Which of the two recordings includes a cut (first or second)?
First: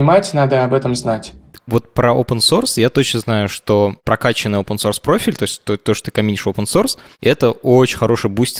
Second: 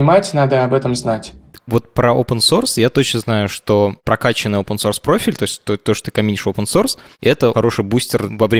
second